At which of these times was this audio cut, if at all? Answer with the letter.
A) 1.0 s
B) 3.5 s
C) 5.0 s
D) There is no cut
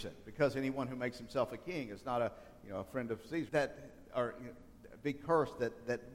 B